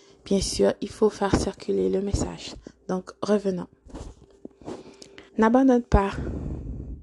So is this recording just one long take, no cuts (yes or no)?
no